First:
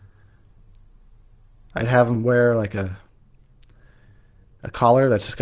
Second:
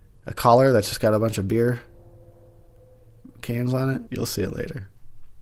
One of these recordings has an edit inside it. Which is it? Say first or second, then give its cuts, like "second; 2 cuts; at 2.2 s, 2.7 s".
second; 1 cut; at 4.1 s